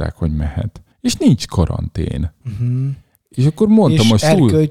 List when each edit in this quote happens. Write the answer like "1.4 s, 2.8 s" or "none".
0.9 s